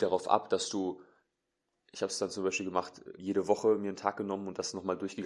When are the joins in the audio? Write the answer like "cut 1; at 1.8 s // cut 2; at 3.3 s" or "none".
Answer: cut 1; at 3.2 s